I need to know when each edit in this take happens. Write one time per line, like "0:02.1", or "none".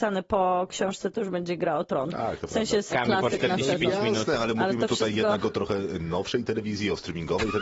0:02.9